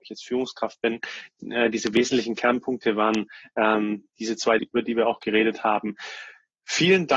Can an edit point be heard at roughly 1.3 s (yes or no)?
no